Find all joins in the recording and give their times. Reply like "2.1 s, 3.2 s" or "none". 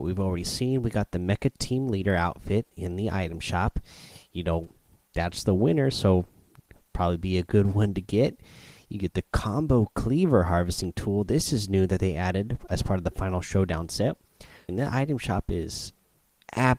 14.7 s